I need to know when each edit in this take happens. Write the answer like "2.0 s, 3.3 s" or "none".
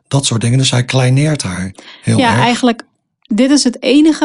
none